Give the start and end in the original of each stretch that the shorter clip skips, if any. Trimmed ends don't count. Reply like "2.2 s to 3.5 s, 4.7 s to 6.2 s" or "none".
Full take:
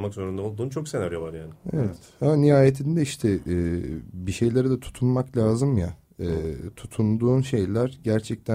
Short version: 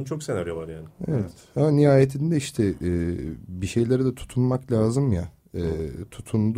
none